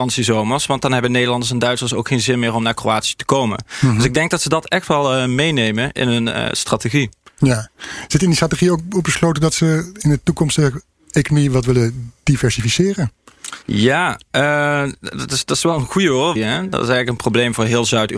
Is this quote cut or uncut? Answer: cut